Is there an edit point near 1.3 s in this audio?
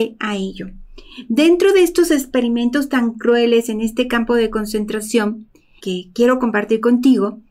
no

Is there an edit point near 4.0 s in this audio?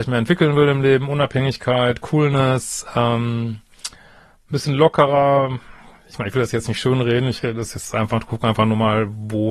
no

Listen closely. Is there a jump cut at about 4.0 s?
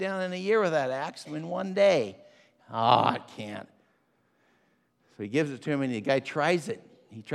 no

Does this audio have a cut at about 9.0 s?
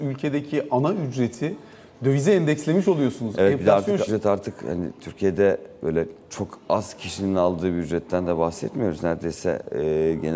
no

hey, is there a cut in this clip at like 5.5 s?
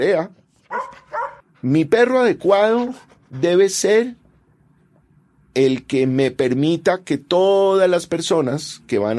no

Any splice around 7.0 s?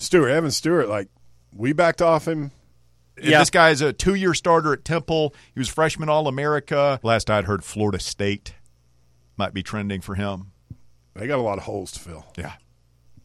yes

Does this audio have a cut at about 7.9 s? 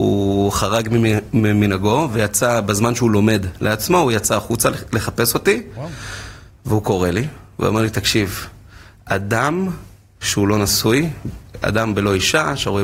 no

